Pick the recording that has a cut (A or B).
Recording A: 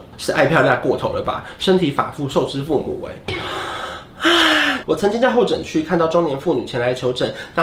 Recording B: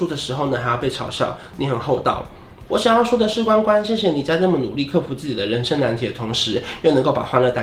B